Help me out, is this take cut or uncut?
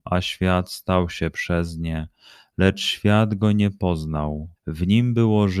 cut